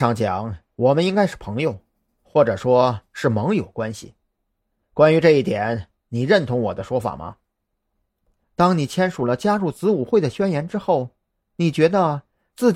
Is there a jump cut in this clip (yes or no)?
yes